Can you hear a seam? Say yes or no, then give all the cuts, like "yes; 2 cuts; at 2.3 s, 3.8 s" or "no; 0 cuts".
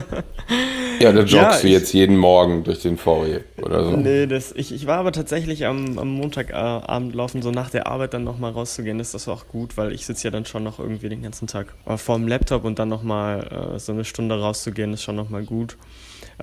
no; 0 cuts